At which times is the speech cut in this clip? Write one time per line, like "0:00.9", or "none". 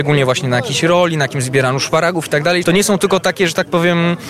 0:02.6